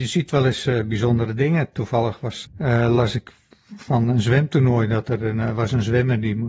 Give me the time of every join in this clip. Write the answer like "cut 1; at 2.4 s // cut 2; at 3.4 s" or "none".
cut 1; at 2.4 s